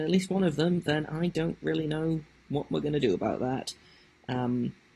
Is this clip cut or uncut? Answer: uncut